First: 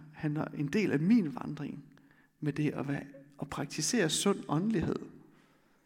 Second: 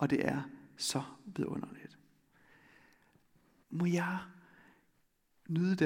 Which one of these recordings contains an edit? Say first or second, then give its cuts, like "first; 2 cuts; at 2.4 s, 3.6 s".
second; 1 cut; at 3.6 s